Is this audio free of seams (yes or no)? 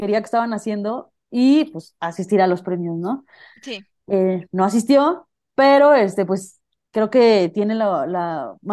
yes